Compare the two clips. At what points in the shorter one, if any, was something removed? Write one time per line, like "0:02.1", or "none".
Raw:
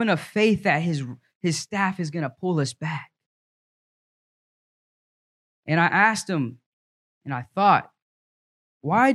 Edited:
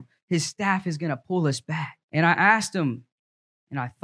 0:02.0